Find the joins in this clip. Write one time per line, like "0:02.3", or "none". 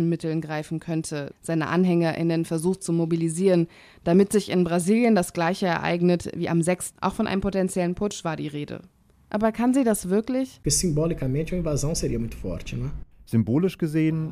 0:06.9
0:09.1